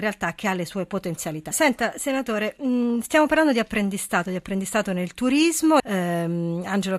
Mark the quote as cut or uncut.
cut